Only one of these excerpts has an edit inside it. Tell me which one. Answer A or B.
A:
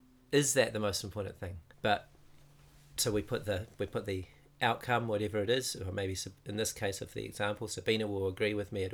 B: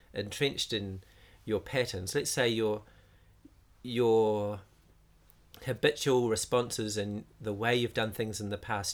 A